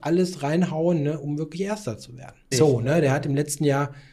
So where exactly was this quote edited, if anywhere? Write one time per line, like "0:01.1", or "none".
0:02.5